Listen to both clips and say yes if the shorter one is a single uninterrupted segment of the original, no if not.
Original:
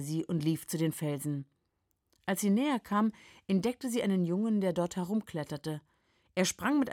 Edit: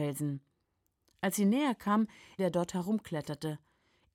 no